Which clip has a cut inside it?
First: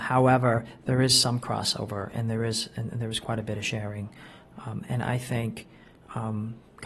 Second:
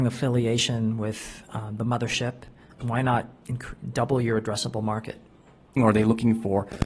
second; 2 cuts; at 2.8 s, 5.8 s

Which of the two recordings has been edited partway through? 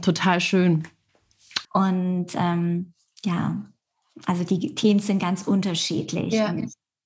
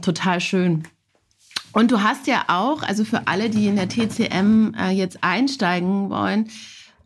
first; 1 cut; at 1.6 s

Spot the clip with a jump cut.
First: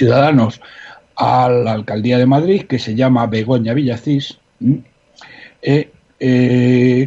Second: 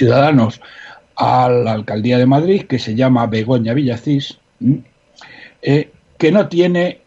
second; 1 cut; at 6.1 s

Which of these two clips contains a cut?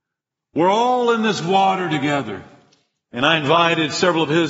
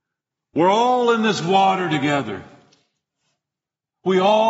first; 1 cut; at 3.0 s

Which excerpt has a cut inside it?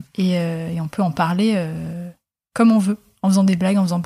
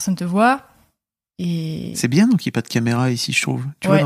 second; 1 cut; at 1.3 s

